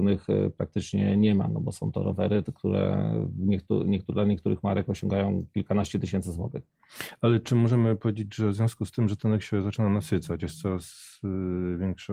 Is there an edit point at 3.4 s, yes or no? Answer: no